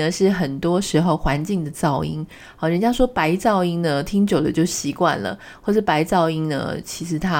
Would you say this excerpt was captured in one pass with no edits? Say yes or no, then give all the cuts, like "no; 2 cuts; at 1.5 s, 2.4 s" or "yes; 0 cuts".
yes; 0 cuts